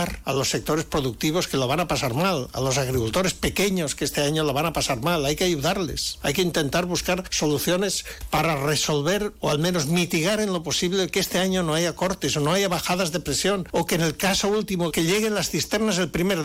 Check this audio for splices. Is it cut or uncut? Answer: cut